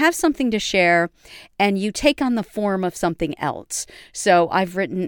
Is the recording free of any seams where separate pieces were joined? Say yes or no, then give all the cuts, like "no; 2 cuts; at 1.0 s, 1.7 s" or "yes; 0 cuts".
yes; 0 cuts